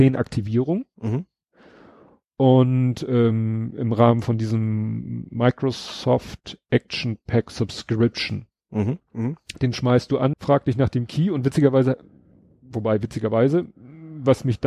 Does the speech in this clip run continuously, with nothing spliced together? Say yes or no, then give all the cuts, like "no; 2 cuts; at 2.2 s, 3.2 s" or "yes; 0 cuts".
no; 2 cuts; at 9.0 s, 10.3 s